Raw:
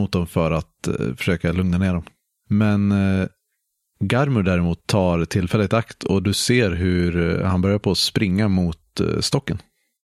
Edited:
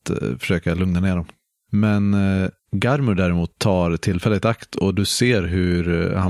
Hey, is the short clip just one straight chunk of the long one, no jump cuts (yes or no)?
no